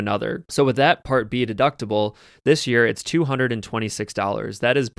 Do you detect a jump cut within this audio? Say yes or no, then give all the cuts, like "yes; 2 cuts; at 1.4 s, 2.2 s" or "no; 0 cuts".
no; 0 cuts